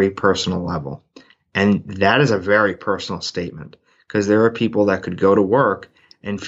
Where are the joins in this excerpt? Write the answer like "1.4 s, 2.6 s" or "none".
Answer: none